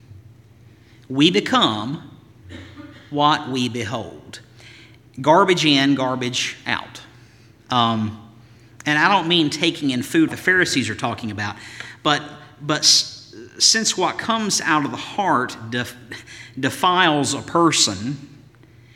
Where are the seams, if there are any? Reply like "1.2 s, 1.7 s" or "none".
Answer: 10.3 s